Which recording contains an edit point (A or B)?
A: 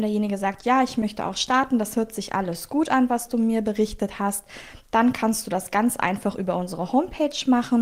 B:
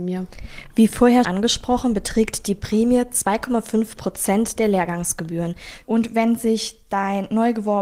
B